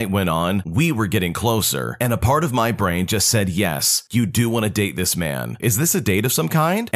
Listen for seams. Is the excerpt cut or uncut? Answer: cut